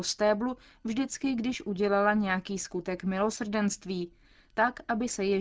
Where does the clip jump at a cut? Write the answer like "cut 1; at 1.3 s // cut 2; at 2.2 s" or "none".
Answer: none